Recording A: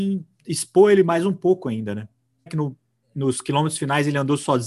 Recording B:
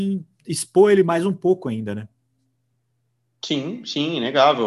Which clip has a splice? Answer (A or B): A